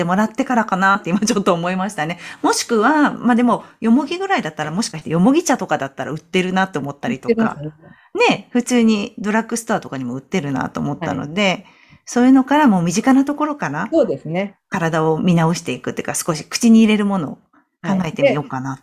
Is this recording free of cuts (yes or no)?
yes